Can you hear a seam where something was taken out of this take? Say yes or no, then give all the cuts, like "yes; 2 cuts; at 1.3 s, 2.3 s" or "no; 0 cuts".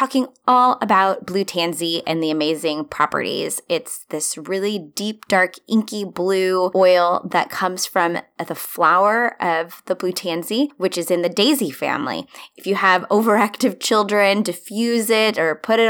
yes; 1 cut; at 12.5 s